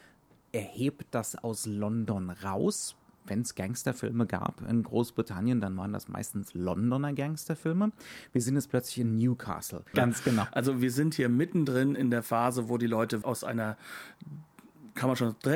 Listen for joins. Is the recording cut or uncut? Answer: cut